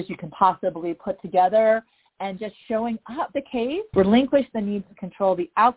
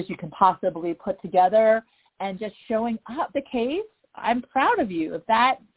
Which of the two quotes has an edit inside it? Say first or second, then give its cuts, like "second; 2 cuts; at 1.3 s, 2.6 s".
first; 1 cut; at 3.9 s